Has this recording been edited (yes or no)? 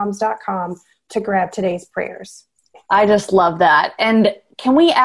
no